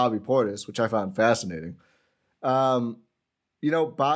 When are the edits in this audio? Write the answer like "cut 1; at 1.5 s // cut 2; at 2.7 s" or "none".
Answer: none